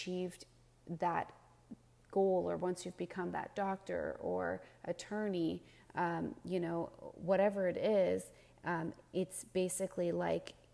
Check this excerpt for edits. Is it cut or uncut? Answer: uncut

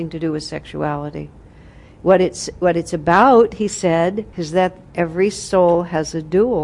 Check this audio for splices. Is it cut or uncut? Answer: cut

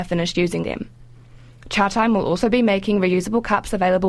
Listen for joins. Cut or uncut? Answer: uncut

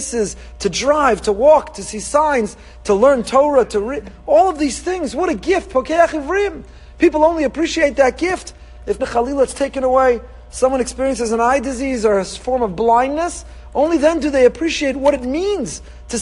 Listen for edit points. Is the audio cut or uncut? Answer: cut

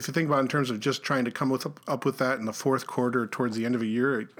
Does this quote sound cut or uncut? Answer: uncut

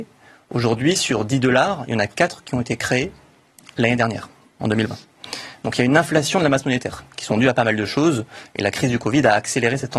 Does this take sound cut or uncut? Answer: uncut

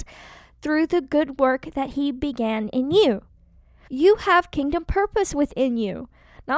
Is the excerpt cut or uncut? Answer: cut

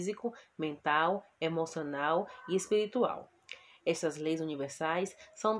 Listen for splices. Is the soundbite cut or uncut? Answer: uncut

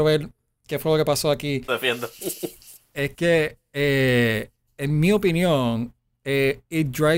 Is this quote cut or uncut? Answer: cut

